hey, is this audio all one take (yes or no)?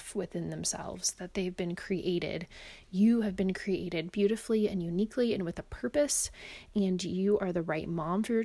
yes